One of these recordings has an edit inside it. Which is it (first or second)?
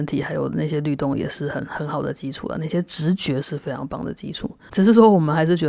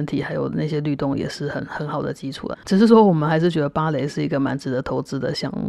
second